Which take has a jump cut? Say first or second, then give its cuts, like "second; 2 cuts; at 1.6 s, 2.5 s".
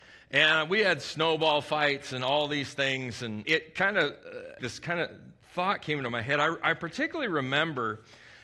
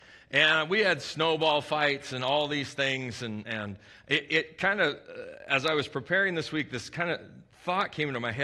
first; 2 cuts; at 3.4 s, 4.6 s